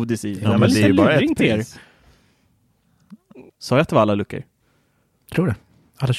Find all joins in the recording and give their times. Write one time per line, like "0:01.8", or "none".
0:03.5